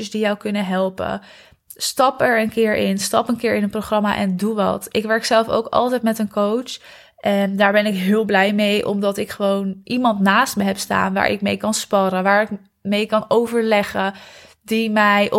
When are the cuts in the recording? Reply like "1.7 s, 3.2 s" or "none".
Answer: none